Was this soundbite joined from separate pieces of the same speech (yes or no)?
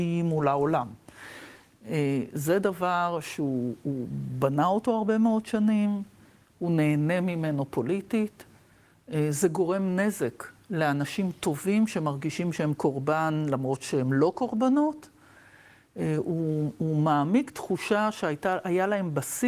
no